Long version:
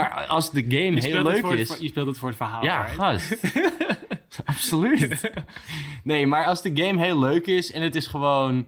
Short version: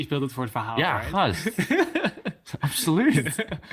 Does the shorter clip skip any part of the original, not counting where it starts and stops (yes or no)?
no